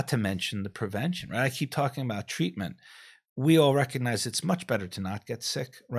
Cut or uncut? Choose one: uncut